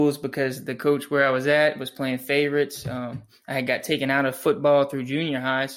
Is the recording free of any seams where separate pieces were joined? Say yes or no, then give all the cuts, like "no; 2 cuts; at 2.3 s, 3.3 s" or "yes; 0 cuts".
yes; 0 cuts